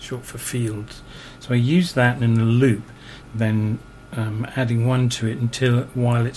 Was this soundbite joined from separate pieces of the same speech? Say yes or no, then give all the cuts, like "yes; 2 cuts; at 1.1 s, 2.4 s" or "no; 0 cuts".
yes; 1 cut; at 3.2 s